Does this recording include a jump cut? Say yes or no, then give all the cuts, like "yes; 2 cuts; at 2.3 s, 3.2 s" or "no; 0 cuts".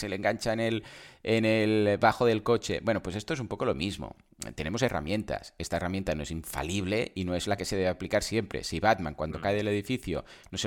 no; 0 cuts